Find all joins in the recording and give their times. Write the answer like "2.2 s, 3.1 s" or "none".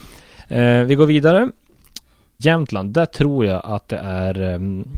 2.4 s

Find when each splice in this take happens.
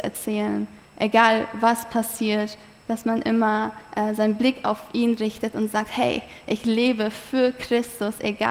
none

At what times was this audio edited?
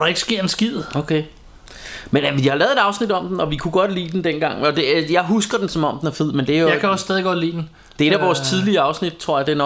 none

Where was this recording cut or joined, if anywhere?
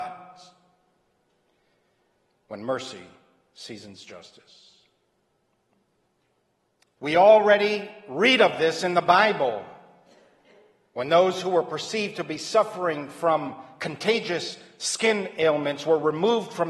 7.0 s

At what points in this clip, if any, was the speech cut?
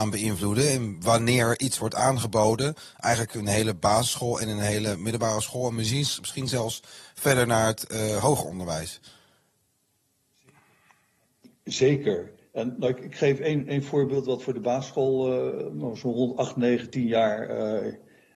none

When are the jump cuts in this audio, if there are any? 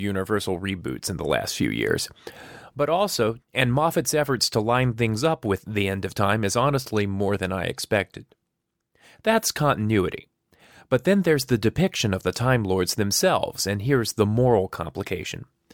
3.4 s

